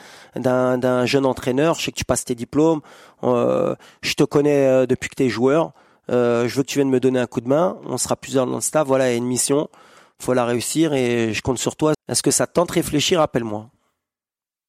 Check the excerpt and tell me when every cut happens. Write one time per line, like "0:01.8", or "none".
0:11.9